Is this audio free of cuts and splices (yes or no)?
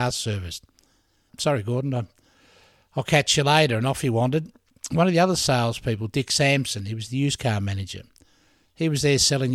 no